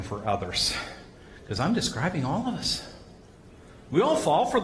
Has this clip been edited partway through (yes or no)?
no